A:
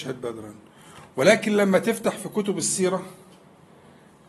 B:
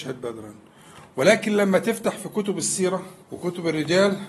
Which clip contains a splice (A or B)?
B